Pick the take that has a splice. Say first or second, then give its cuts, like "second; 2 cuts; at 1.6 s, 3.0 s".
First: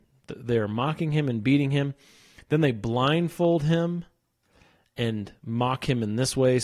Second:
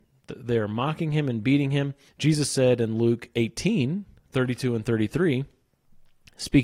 second; 1 cut; at 2.1 s